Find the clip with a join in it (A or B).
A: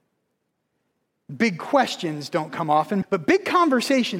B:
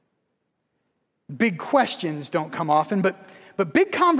A